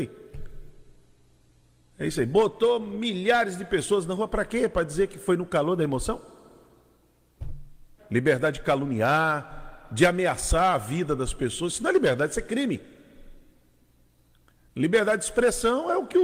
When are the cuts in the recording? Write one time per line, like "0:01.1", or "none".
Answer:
0:08.0